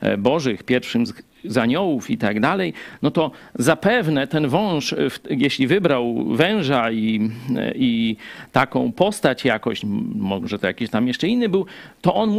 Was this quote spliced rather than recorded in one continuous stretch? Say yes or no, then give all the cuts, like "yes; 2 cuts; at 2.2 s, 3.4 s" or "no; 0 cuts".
no; 0 cuts